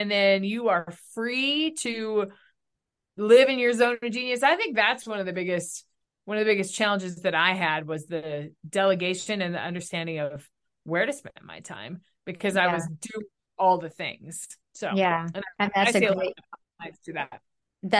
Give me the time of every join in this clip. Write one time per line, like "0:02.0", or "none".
none